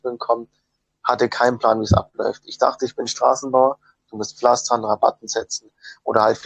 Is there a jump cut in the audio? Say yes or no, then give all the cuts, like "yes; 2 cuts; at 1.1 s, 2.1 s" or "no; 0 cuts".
no; 0 cuts